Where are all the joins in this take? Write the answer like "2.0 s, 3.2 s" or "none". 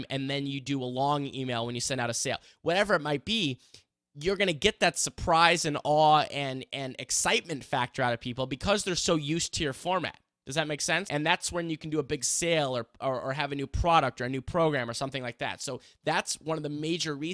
11.1 s